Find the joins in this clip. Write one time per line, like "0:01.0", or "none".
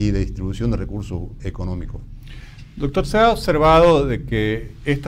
0:01.4